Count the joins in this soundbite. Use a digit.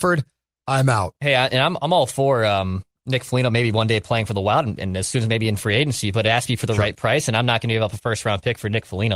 0